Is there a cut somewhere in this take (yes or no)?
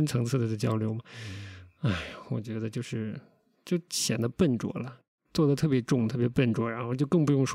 no